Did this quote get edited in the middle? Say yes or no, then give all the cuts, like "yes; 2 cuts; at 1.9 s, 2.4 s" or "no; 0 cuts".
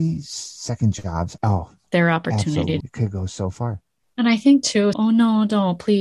yes; 3 cuts; at 1.4 s, 2.8 s, 4.9 s